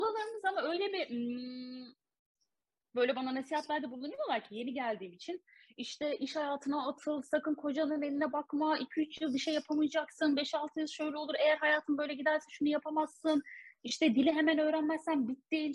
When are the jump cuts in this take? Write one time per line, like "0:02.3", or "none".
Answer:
none